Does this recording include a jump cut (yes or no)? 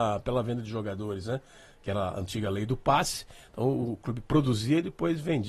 no